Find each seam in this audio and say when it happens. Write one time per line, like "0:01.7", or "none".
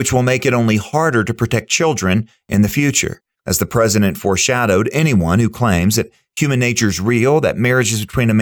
0:03.3